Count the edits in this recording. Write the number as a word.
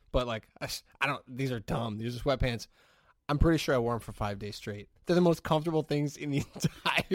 one